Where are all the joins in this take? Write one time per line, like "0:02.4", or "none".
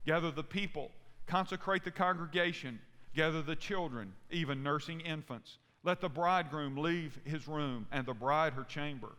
0:03.1

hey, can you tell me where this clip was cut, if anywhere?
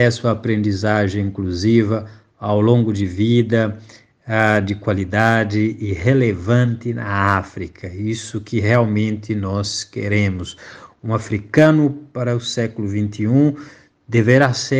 none

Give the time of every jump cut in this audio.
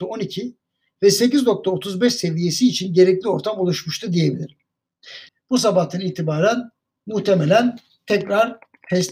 0:05.3

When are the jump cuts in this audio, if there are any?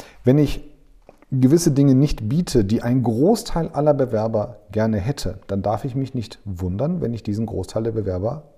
none

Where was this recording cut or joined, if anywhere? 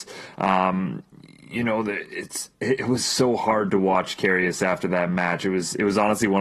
0:02.5

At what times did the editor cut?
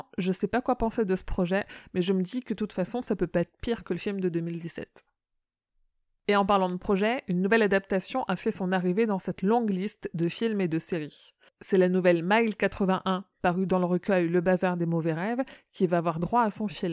none

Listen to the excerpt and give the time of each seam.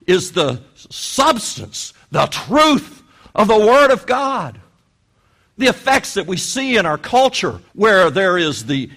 0:05.5
0:07.7

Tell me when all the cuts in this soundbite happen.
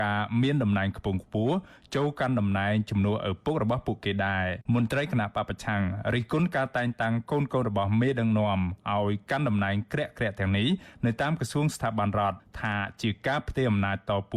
0:04.7

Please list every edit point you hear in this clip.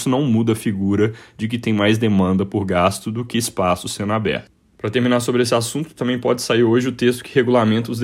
none

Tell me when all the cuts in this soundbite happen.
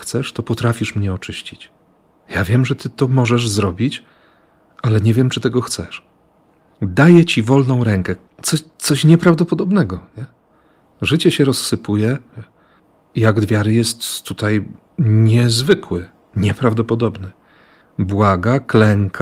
0:12.3

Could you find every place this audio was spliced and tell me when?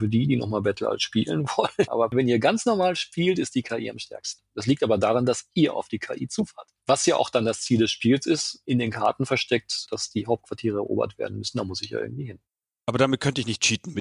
0:01.9
0:06.8

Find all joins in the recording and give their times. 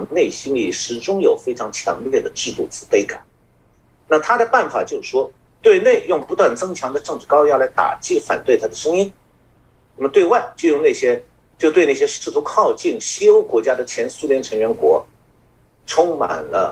none

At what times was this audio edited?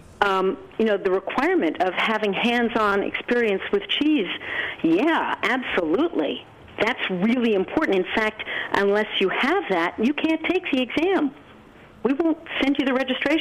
none

